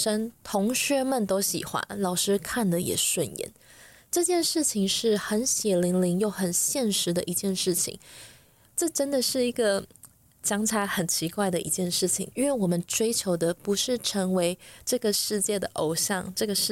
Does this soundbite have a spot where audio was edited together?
yes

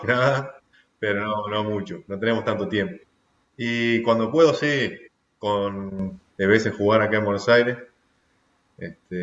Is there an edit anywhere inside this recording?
yes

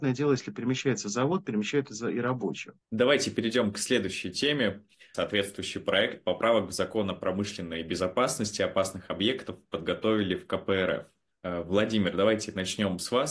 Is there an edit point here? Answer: yes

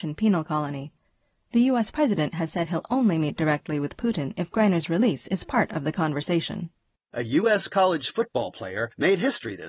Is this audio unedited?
no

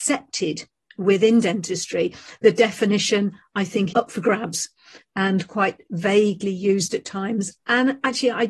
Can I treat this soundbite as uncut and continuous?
no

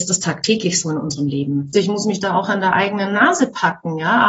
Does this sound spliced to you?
yes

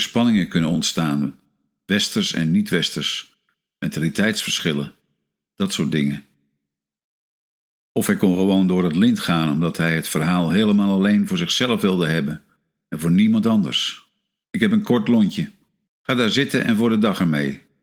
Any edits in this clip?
yes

